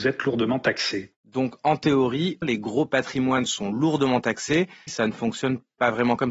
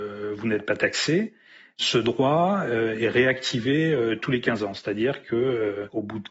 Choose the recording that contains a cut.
first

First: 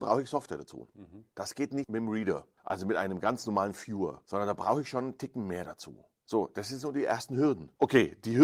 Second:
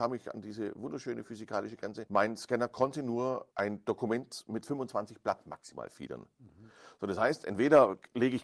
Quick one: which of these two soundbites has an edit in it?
first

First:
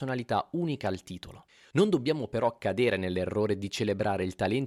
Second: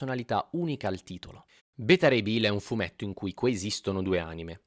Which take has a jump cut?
second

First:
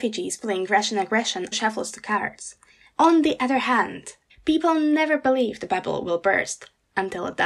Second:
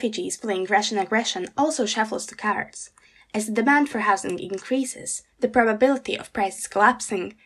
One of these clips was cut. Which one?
first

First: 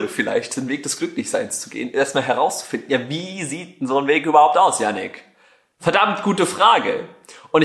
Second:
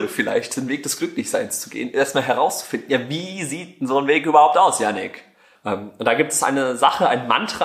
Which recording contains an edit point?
second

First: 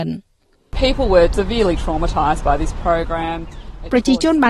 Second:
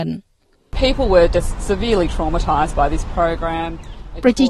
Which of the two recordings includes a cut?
first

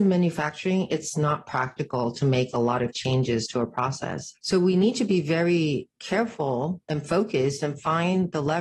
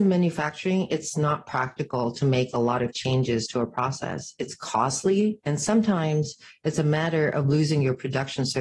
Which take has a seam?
first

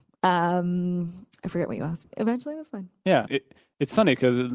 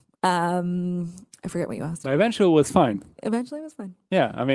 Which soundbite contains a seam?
first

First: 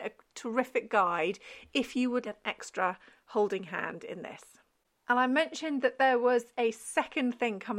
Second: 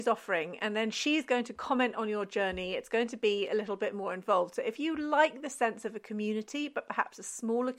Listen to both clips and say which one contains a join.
first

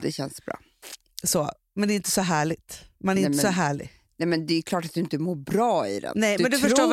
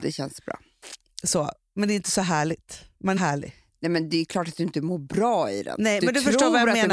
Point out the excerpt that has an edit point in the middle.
second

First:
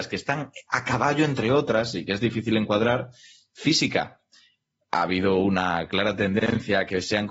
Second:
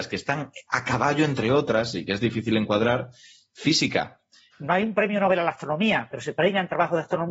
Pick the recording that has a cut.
second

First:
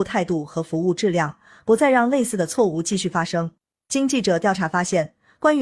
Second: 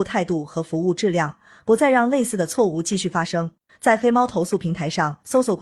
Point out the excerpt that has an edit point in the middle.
second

